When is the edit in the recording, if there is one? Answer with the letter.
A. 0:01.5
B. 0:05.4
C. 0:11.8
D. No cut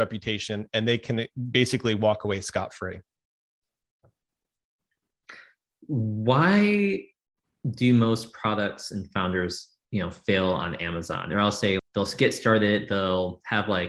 C